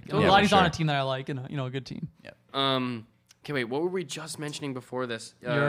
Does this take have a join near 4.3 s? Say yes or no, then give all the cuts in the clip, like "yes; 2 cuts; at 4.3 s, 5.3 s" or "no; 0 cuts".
no; 1 cut; at 2.5 s